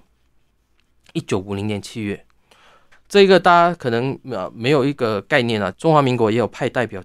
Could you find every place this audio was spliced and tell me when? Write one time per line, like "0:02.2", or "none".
0:02.9
0:05.7